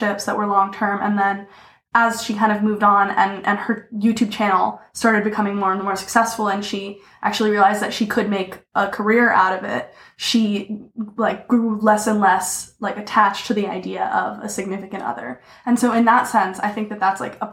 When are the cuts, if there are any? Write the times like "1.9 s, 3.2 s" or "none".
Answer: none